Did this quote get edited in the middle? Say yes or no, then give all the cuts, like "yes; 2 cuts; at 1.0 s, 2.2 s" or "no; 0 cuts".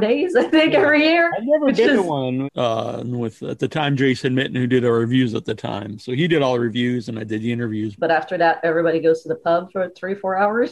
yes; 2 cuts; at 2.5 s, 8.0 s